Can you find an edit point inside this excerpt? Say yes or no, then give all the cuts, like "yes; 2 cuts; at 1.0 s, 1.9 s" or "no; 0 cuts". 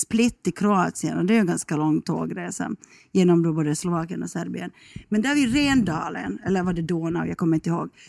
no; 0 cuts